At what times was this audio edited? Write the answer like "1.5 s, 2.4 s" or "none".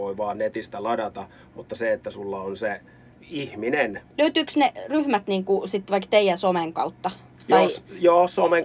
3.1 s, 4.1 s